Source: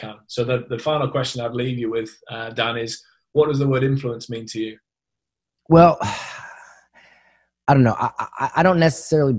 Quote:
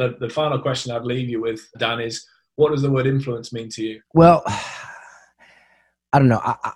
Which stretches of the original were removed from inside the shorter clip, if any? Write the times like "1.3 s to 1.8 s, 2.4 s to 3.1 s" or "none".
2.2 s to 2.5 s, 4.8 s to 5.6 s